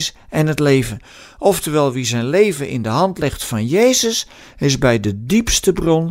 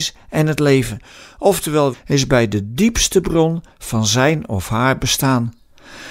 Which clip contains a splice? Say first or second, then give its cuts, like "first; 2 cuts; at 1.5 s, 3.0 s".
second; 1 cut; at 1.9 s